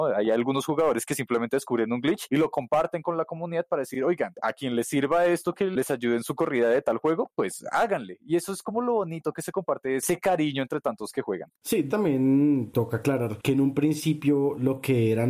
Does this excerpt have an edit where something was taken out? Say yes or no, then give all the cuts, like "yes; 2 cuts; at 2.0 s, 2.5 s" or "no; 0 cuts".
no; 0 cuts